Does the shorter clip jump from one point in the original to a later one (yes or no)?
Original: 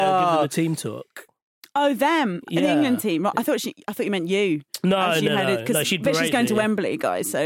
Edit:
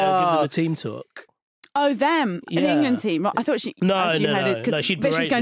yes